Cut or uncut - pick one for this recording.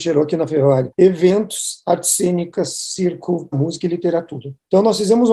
cut